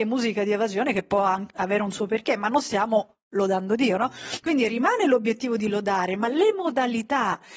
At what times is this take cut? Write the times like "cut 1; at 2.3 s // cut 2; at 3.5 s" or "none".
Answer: none